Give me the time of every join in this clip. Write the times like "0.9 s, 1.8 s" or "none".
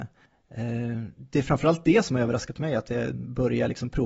3.1 s

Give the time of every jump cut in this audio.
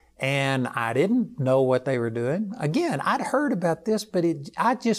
none

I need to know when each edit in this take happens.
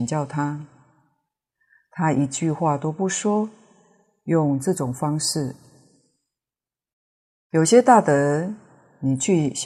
none

